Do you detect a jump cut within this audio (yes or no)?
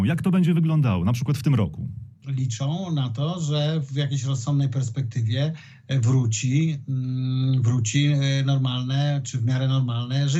yes